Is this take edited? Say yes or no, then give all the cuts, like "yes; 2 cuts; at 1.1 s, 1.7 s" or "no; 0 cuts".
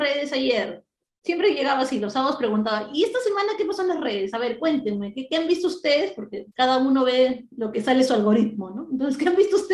no; 0 cuts